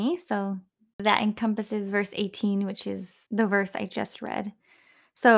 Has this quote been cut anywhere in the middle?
yes; 1 cut; at 3.2 s

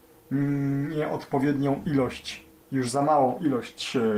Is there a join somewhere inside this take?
yes; 1 cut; at 2.6 s

